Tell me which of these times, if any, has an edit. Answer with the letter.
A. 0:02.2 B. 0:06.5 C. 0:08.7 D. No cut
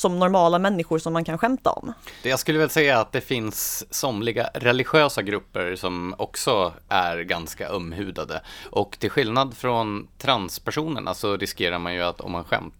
A